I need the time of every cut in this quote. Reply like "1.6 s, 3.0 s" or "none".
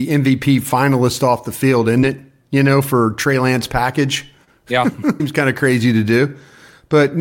5.2 s